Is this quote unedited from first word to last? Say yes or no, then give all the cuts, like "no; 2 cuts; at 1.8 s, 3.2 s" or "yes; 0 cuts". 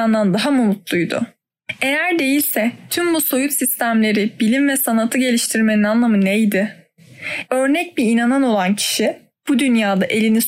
no; 1 cut; at 7.4 s